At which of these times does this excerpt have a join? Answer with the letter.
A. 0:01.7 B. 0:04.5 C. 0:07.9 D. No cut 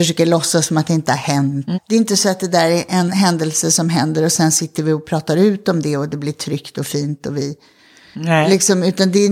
A